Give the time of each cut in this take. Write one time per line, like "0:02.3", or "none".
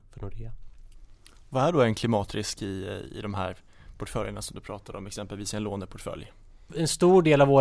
none